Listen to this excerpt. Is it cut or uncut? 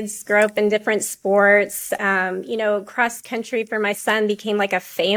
uncut